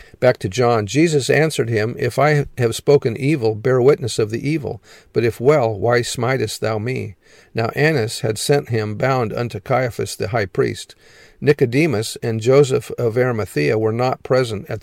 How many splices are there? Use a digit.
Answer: 0